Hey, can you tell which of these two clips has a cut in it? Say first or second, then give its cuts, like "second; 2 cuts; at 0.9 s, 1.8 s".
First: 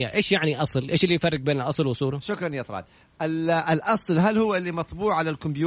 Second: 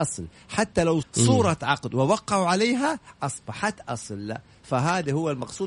second; 1 cut; at 1.0 s